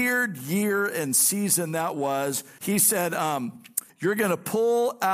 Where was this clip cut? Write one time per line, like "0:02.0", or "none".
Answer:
0:02.6
0:03.9